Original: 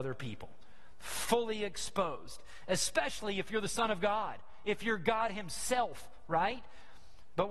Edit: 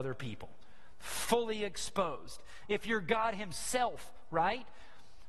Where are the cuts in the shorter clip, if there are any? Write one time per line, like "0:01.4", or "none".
0:02.6